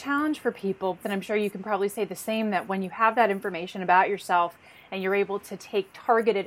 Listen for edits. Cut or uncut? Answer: cut